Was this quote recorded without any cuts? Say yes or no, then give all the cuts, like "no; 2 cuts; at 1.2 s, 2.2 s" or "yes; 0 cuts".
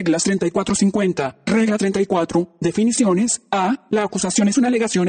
no; 1 cut; at 3.9 s